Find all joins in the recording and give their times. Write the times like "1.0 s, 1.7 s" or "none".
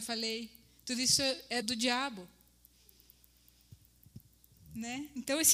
1.6 s